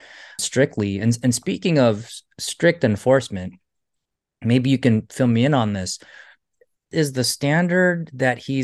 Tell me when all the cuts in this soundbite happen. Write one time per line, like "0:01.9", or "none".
none